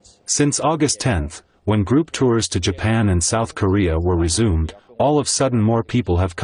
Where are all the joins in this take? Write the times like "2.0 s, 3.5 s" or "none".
none